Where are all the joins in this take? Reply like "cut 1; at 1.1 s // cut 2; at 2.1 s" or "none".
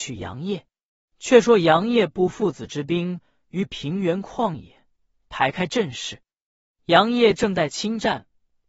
cut 1; at 1.1 s // cut 2; at 6.7 s